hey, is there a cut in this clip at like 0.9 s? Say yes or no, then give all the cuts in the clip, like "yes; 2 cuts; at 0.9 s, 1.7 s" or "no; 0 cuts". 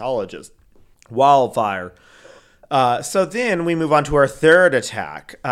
yes; 1 cut; at 0.9 s